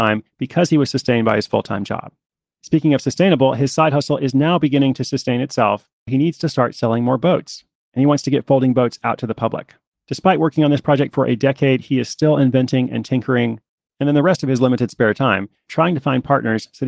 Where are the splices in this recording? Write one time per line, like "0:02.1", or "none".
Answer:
0:06.1
0:13.8
0:15.7